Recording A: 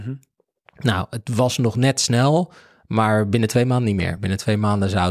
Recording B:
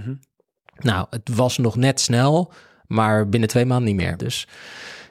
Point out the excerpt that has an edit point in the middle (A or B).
B